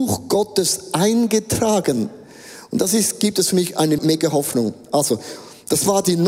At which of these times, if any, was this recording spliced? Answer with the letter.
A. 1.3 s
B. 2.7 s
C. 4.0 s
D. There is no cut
C